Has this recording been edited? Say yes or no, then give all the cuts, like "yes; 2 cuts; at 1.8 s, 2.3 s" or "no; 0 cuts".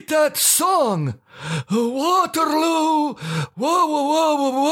no; 0 cuts